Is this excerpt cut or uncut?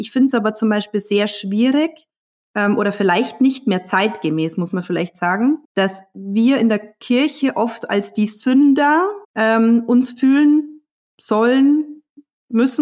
cut